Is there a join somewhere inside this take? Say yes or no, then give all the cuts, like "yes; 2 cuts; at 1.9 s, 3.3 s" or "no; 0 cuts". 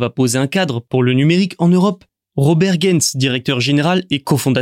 yes; 1 cut; at 2.2 s